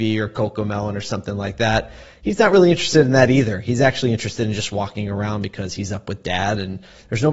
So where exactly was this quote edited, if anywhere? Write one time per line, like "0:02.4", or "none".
none